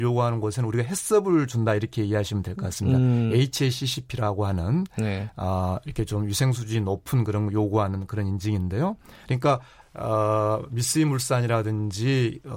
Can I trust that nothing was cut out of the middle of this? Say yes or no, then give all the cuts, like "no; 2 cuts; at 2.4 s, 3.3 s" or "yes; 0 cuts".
no; 1 cut; at 9.8 s